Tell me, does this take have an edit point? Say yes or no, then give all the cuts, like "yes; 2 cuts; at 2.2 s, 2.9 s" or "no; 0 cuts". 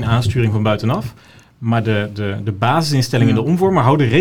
no; 0 cuts